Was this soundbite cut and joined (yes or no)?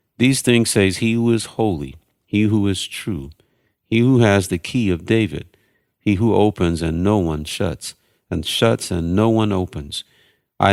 no